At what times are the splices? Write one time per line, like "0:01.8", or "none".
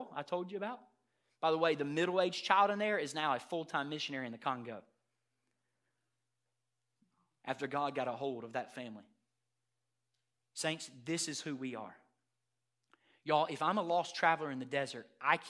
none